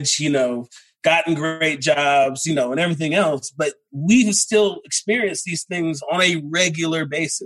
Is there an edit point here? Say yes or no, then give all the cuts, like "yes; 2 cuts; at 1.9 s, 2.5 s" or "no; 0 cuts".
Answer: no; 0 cuts